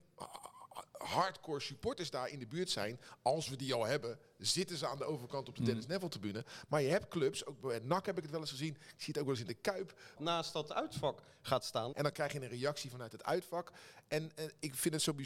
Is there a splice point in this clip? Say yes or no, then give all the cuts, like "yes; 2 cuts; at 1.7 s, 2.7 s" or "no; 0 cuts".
yes; 2 cuts; at 10.2 s, 11.9 s